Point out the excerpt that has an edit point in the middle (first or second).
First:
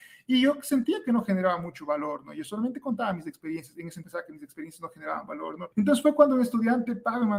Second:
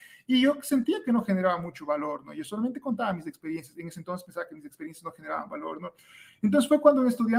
first